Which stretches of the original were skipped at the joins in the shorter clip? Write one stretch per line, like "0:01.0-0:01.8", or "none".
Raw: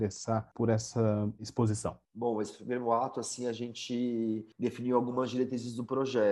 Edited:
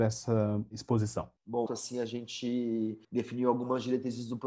0:02.3-0:03.1